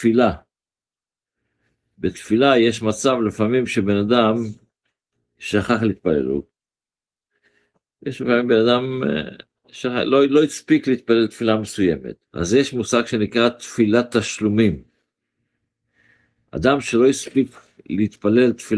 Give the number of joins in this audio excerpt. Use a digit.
1